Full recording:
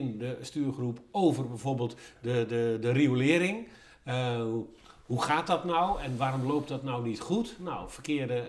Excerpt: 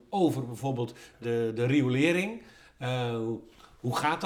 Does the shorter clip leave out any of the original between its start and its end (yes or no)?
yes